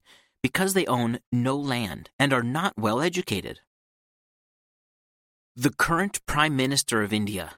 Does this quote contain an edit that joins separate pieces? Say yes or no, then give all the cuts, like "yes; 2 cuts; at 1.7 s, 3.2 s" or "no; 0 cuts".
no; 0 cuts